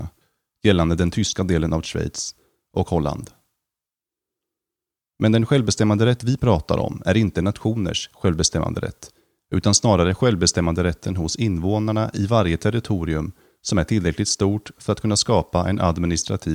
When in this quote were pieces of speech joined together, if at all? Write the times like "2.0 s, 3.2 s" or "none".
none